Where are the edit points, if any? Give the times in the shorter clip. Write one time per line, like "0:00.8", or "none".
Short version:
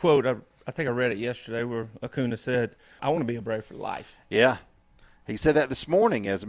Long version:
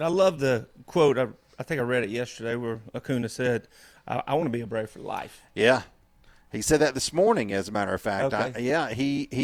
0:03.0